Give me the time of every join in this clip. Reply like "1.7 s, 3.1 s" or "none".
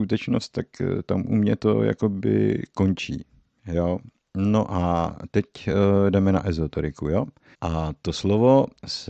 7.5 s